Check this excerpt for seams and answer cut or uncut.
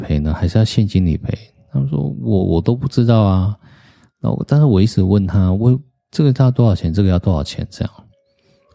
uncut